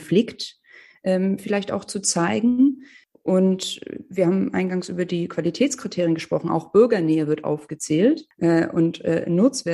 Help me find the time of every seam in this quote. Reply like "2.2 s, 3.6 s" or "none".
none